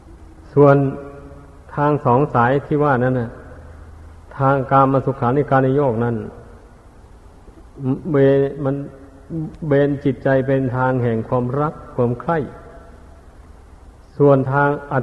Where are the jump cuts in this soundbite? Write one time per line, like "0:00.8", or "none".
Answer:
none